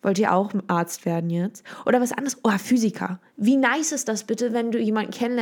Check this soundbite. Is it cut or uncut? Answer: uncut